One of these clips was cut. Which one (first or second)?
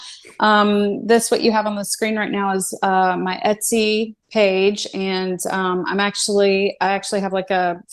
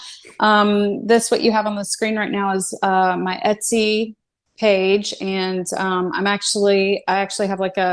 first